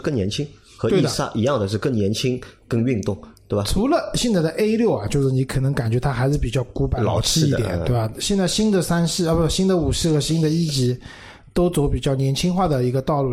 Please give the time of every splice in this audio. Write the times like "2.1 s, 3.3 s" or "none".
none

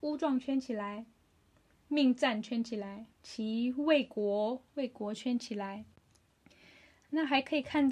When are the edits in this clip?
1.7 s, 3.1 s, 4.7 s

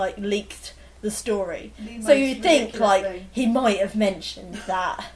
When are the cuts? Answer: none

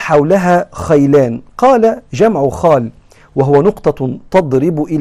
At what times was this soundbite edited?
none

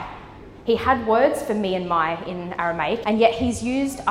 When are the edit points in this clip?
3.0 s

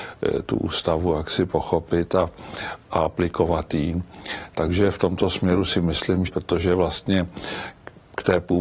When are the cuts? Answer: 6.3 s

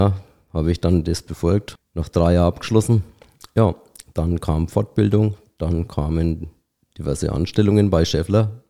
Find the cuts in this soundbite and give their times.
1.8 s

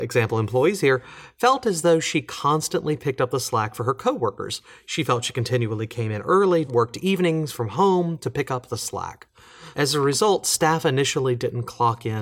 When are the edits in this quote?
6.7 s, 9.7 s

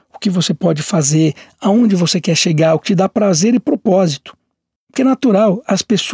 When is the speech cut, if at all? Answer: 4.8 s

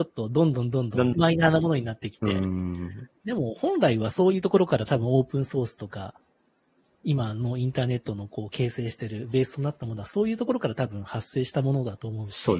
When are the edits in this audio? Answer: 1.1 s

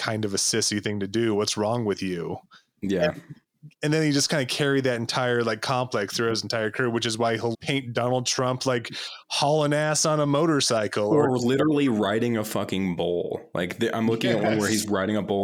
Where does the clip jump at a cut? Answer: 7.5 s

